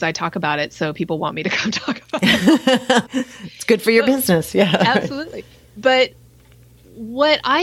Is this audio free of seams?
no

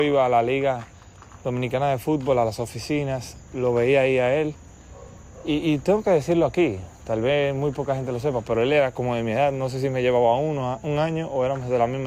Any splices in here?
no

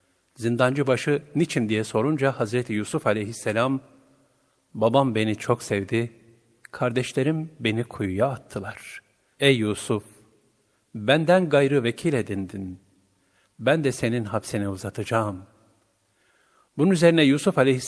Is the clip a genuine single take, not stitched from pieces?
no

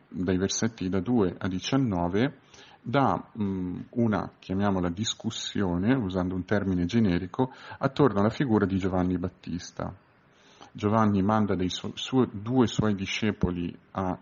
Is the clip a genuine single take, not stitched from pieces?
yes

